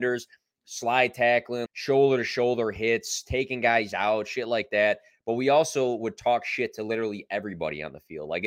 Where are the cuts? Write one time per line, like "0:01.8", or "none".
0:01.7